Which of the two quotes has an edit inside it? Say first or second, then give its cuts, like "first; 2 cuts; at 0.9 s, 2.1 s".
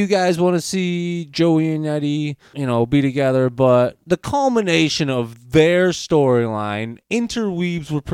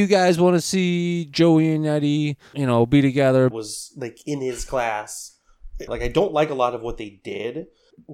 second; 2 cuts; at 3.5 s, 5.9 s